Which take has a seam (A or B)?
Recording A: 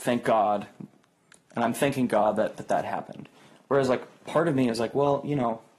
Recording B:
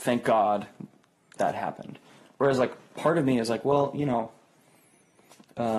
B